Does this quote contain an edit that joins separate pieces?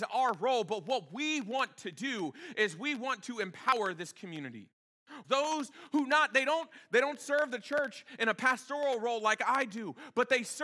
yes; 1 cut; at 5.2 s

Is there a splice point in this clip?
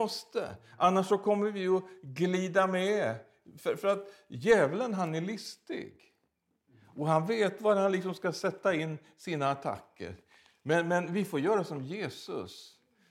no; 0 cuts

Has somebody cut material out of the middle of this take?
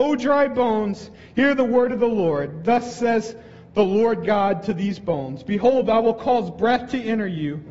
no; 0 cuts

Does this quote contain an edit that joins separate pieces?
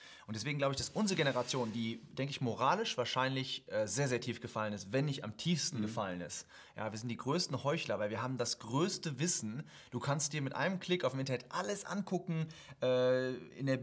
no; 0 cuts

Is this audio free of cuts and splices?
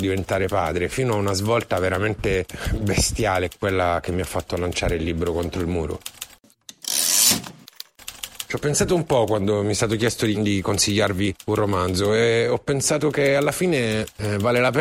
no; 1 cut; at 10.3 s

